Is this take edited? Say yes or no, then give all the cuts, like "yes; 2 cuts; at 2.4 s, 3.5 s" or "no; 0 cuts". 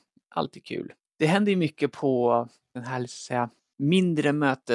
no; 0 cuts